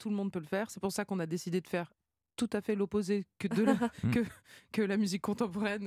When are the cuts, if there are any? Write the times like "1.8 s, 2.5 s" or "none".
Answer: none

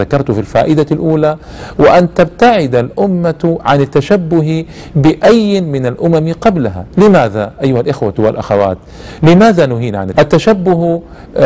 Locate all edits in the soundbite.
10.1 s

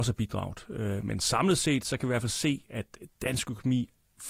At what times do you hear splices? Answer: none

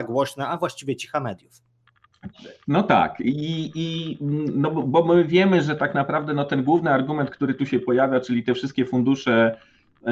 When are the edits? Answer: none

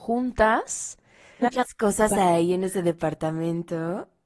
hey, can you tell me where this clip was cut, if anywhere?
1.4 s

